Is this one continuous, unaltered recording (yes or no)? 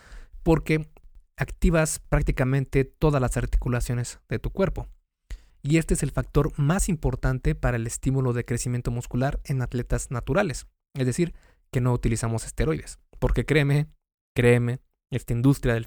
no